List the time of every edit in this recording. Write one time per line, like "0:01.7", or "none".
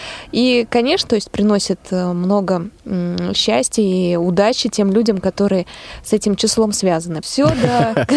0:01.1
0:07.2